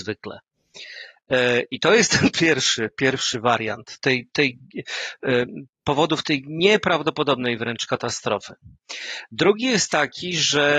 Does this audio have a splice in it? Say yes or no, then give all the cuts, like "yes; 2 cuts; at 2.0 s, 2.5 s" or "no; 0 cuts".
yes; 1 cut; at 4.0 s